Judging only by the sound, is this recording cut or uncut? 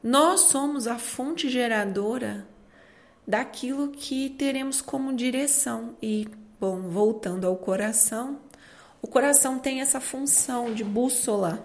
uncut